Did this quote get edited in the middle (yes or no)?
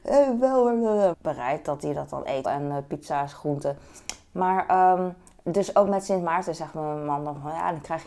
yes